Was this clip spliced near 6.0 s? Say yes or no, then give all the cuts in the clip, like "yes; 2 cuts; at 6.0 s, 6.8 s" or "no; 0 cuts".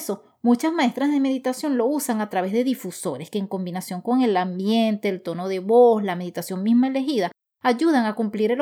no; 0 cuts